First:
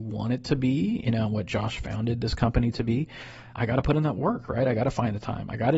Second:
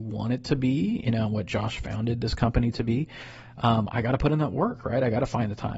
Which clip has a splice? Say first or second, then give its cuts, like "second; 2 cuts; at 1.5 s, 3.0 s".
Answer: first; 1 cut; at 3.5 s